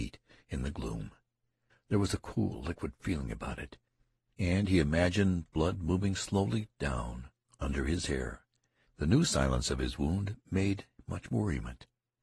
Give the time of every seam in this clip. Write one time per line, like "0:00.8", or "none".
0:01.7
0:08.9